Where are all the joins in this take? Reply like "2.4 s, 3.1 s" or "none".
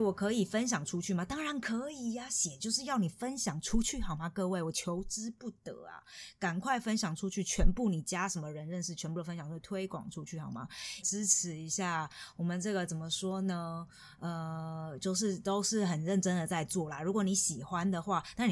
11.0 s

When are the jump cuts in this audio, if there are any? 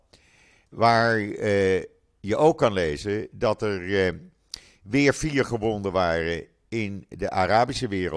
none

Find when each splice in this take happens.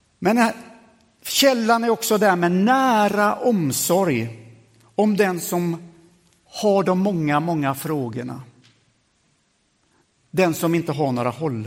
none

